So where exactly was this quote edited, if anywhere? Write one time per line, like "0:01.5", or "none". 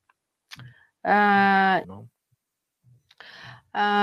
0:01.8